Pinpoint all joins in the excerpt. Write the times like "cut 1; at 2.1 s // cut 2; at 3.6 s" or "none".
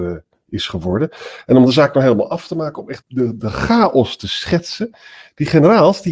cut 1; at 3.0 s